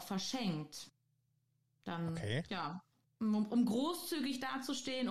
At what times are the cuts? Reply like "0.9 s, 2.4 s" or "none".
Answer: none